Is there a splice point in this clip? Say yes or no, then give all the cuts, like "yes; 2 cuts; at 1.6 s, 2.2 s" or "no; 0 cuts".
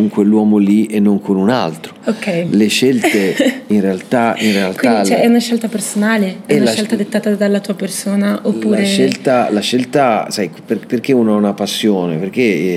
no; 0 cuts